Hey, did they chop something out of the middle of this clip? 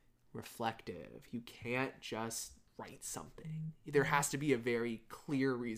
no; 0 cuts

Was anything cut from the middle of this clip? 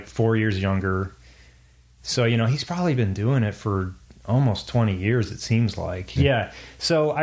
yes; 1 cut; at 6.2 s

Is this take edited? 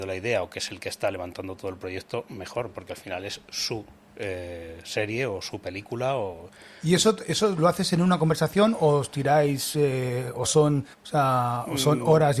yes; 1 cut; at 10.9 s

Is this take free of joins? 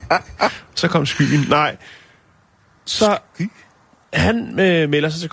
yes; 0 cuts

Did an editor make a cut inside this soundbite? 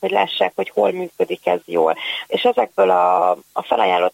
yes; 1 cut; at 2.3 s

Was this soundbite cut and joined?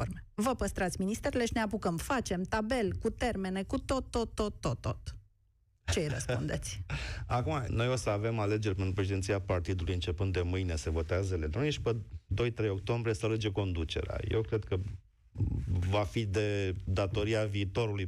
yes; 1 cut; at 7.7 s

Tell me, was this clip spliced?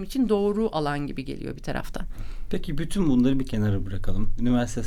no; 0 cuts

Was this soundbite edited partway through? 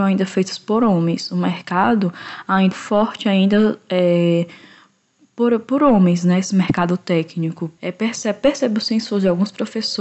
yes; 2 cuts; at 2.7 s, 7.8 s

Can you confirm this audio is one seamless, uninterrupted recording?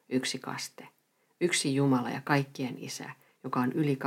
yes; 0 cuts

